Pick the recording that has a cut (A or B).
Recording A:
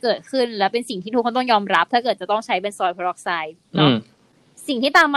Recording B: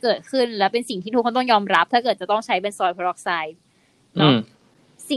A